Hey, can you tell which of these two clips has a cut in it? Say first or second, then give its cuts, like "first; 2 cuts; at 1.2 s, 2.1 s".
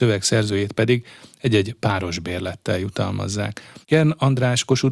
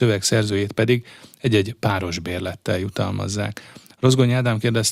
first; 1 cut; at 3.8 s